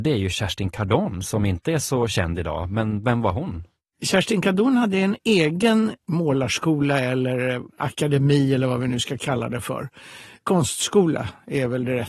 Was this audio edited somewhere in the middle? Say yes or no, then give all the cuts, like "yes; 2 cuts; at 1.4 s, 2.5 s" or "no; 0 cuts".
no; 0 cuts